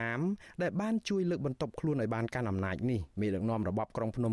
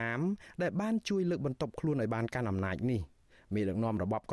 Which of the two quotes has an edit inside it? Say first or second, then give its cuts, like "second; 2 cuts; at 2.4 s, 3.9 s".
first; 1 cut; at 3.1 s